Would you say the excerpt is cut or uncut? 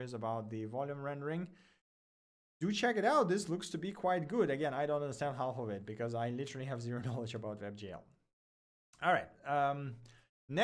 uncut